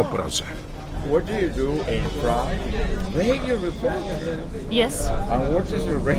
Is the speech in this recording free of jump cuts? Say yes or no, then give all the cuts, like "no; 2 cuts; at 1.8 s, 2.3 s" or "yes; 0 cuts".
no; 2 cuts; at 1.8 s, 3.1 s